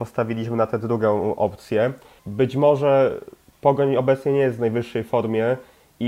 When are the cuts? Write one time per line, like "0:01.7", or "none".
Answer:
0:02.2